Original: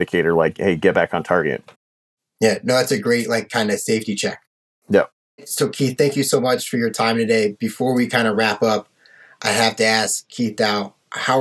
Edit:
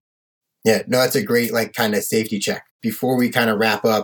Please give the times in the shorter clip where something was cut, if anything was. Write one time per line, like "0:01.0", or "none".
0:02.8